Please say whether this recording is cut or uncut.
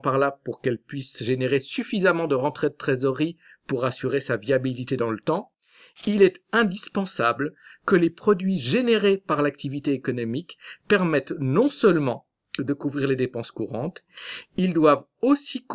uncut